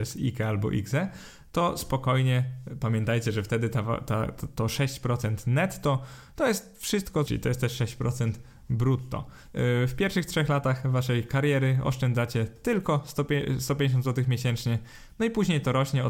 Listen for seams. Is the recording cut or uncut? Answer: cut